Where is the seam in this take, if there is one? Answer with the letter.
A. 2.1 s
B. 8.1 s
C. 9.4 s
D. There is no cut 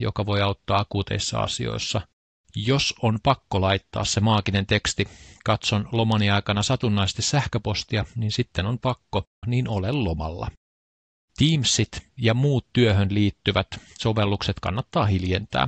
C